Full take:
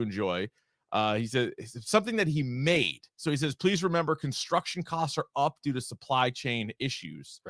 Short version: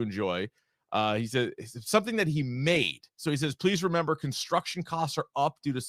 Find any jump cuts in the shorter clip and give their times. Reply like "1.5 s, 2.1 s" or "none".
none